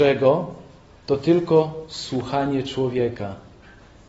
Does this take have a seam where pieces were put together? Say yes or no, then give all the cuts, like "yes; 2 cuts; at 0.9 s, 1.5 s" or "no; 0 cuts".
no; 0 cuts